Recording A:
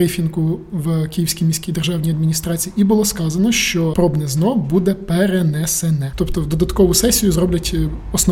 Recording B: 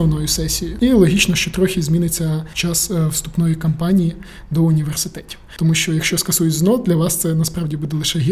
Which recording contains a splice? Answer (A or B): A